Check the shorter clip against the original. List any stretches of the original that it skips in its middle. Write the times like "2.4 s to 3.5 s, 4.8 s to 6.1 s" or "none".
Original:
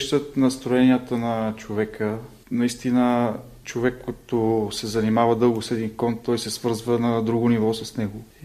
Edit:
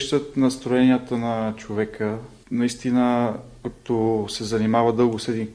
3.6 s to 4.1 s